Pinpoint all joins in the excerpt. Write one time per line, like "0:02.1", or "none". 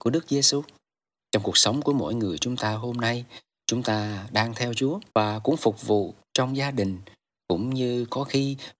0:01.2
0:05.1